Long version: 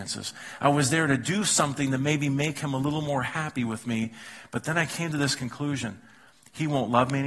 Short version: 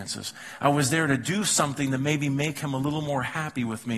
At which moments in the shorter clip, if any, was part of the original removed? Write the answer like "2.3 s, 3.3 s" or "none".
none